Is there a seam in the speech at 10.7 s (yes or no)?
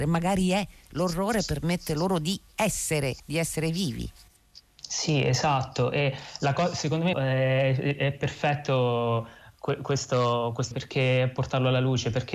yes